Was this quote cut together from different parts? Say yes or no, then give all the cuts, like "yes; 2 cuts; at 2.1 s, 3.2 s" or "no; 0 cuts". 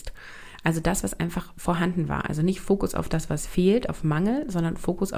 no; 0 cuts